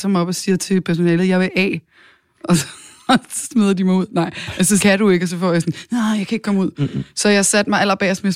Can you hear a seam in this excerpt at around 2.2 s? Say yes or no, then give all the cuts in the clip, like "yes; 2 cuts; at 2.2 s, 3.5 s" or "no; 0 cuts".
no; 1 cut; at 4.8 s